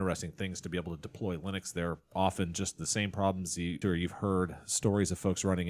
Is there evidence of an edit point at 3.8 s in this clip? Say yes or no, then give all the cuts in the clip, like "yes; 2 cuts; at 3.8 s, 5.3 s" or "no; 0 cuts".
yes; 1 cut; at 3.8 s